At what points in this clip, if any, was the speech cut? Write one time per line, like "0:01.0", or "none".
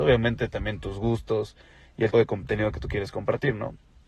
0:02.1